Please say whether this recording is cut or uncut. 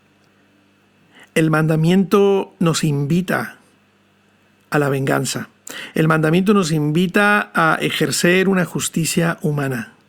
uncut